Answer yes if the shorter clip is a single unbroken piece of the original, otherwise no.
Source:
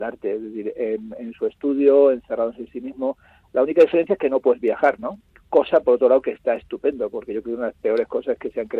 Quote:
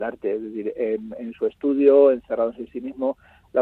yes